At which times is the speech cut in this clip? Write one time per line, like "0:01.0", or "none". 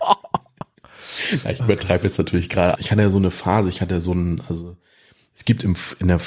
0:02.8